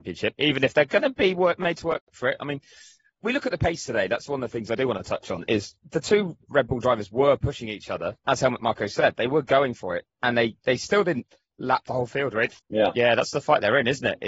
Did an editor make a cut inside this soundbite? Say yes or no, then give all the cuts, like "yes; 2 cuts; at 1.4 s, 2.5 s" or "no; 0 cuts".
yes; 1 cut; at 12.6 s